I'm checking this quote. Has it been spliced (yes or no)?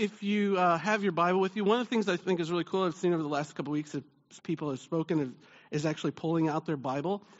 no